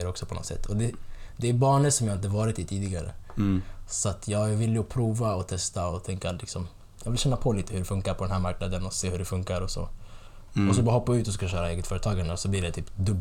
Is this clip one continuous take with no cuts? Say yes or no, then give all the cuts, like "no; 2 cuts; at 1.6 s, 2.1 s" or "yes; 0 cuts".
no; 2 cuts; at 7.0 s, 10.5 s